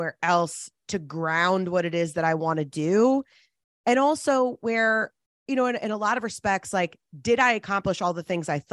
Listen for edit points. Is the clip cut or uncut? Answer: uncut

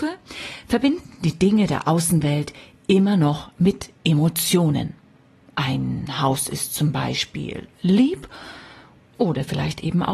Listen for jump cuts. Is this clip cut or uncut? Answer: uncut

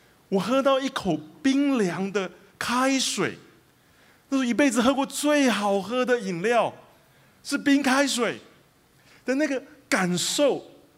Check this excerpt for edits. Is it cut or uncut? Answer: uncut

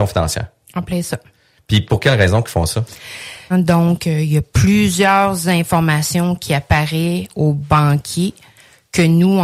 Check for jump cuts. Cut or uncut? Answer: cut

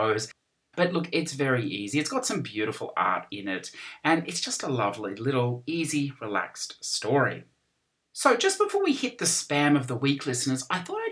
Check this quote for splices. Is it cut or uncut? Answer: uncut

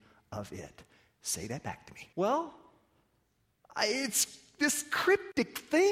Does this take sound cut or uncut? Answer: cut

